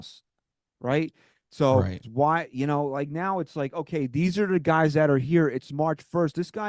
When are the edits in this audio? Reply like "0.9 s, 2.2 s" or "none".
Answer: 2.0 s